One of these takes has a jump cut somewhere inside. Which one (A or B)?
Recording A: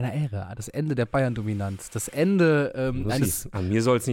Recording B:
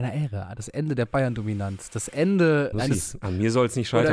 B